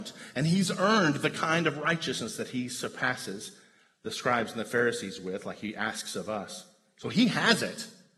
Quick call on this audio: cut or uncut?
uncut